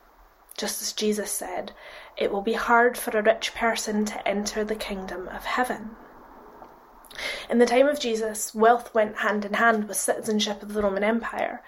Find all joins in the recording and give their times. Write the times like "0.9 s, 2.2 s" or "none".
none